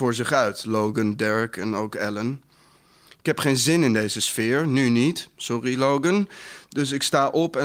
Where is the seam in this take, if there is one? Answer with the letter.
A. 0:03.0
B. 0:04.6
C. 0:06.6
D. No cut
D